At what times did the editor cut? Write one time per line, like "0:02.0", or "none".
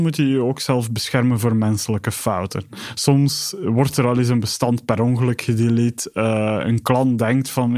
none